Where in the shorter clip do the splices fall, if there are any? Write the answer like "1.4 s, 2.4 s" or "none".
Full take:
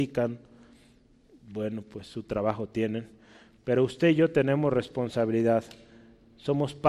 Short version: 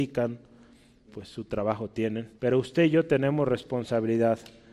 1.1 s, 2.4 s